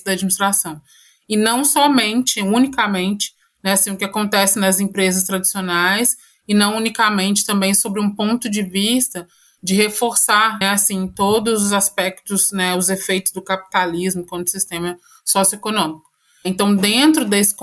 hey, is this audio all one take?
no; 1 cut; at 10.6 s

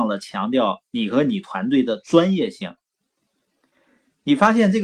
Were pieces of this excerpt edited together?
yes; 1 cut; at 3.4 s

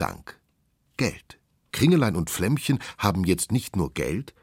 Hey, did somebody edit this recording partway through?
yes; 1 cut; at 1.7 s

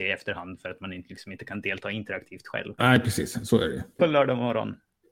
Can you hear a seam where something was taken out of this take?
yes; 1 cut; at 4.0 s

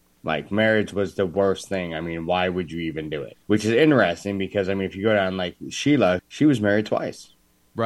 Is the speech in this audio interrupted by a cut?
yes; 2 cuts; at 3.4 s, 6.2 s

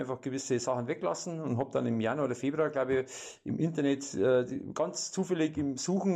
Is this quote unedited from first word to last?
yes; 0 cuts

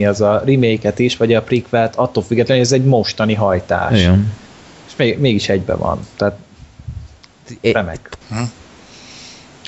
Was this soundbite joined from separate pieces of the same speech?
yes; 1 cut; at 8.2 s

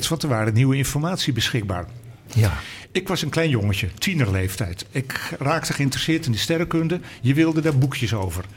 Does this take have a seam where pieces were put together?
yes; 1 cut; at 2.3 s

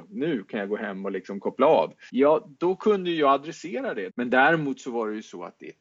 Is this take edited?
yes; 2 cuts; at 2.1 s, 4.1 s

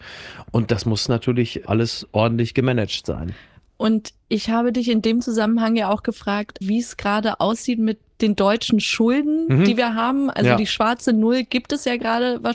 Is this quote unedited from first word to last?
no; 1 cut; at 6.6 s

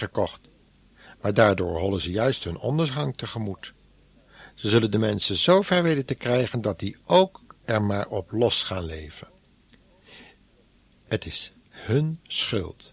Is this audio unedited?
yes; 0 cuts

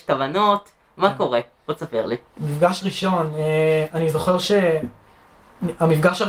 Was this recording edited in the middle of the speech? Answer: no; 0 cuts

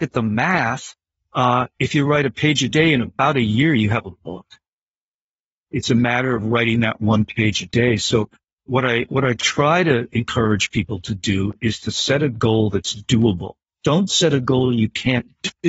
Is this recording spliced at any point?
no; 0 cuts

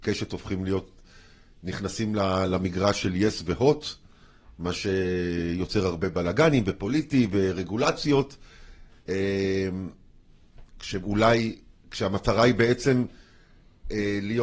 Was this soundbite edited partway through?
no; 0 cuts

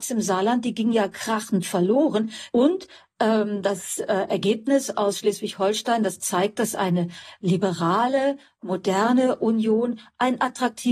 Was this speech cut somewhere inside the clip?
yes; 1 cut; at 2.5 s

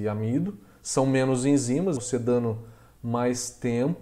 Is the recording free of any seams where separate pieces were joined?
no; 1 cut; at 2.0 s

